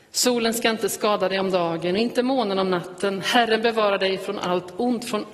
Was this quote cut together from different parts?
no; 0 cuts

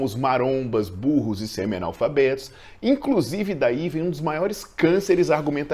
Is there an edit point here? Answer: no; 0 cuts

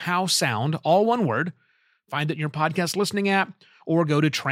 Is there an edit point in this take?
no; 0 cuts

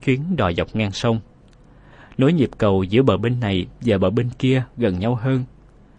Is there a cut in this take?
no; 0 cuts

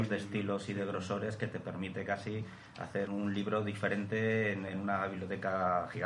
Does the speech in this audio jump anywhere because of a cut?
yes; 2 cuts; at 3.1 s, 4.7 s

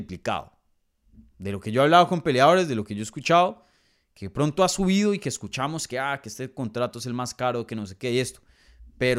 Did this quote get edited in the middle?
no; 0 cuts

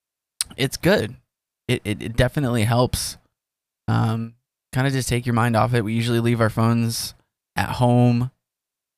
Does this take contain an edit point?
no; 0 cuts

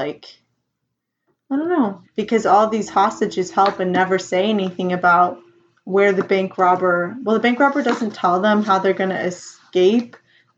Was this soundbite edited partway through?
yes; 1 cut; at 2.0 s

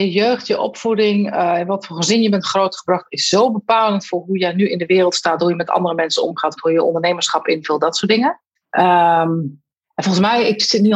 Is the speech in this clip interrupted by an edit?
yes; 2 cuts; at 6.6 s, 8.6 s

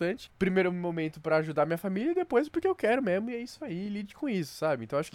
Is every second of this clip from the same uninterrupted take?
yes; 0 cuts

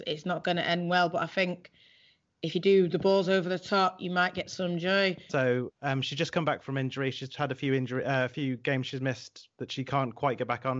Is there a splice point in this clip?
yes; 1 cut; at 5.3 s

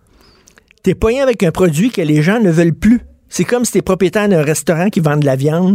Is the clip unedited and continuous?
yes; 0 cuts

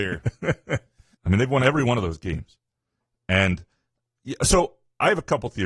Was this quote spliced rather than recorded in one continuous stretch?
yes; 1 cut; at 1.1 s

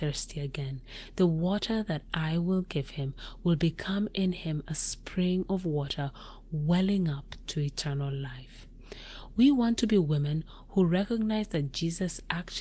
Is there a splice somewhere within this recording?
no; 0 cuts

